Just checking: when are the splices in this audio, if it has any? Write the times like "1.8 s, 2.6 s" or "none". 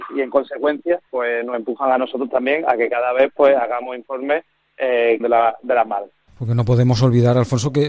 1.1 s, 5.2 s